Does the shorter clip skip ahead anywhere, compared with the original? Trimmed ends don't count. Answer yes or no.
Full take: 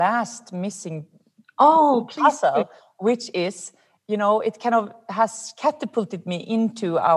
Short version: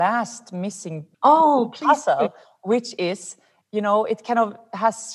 yes